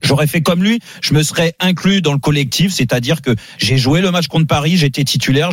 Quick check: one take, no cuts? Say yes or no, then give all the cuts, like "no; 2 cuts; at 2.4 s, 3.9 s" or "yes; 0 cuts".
yes; 0 cuts